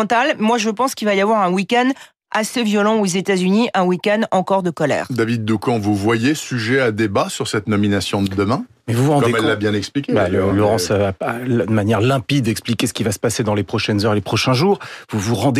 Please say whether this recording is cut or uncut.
uncut